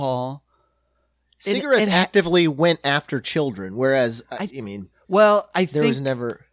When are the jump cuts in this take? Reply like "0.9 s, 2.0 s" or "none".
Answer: none